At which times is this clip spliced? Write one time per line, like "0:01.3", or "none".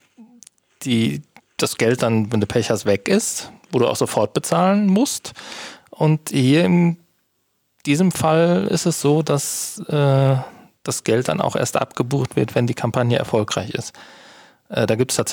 none